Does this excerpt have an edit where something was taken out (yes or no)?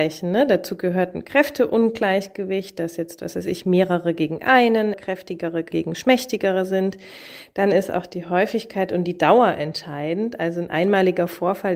yes